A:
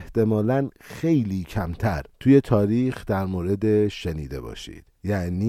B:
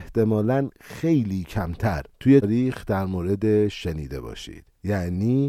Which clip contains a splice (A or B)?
B